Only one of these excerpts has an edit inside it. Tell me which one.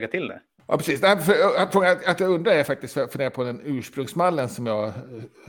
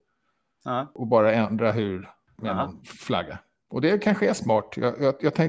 second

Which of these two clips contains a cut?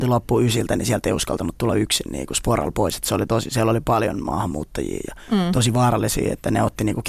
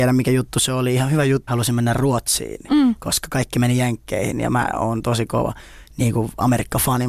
second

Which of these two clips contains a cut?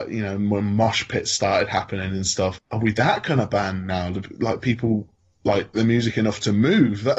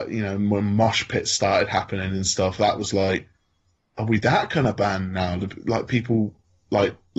first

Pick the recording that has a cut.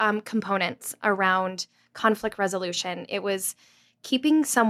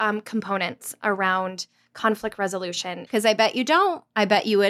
second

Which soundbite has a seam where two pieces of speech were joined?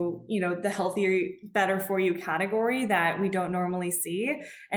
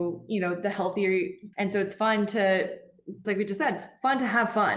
second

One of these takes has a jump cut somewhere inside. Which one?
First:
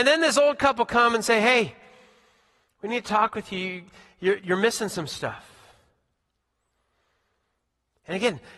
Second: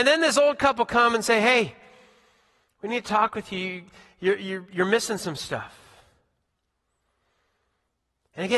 first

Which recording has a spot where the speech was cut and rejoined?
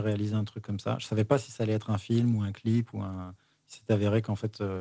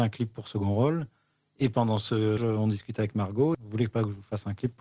second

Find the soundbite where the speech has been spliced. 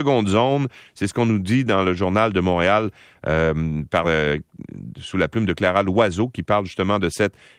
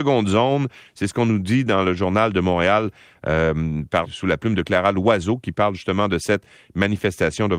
second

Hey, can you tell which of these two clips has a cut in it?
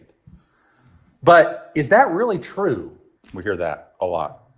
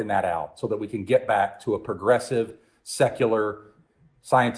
first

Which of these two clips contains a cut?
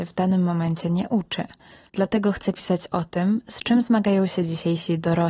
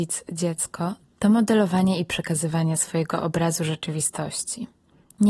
first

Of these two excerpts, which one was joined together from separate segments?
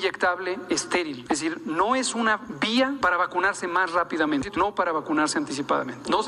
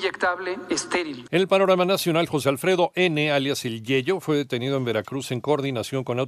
second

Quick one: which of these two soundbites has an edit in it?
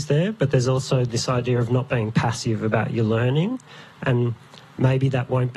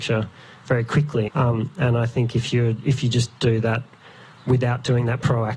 second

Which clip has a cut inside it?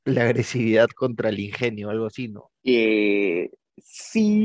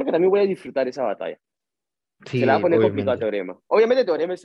first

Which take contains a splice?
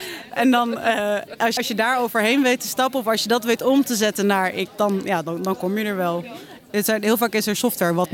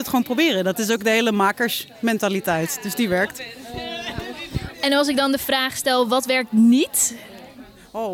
first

